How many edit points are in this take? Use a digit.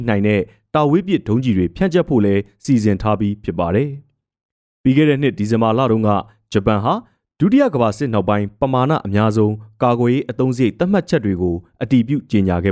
0